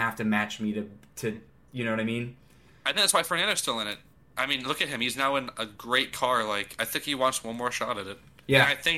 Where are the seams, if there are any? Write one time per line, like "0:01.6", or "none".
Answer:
none